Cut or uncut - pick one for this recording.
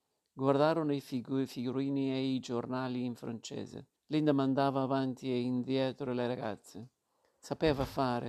cut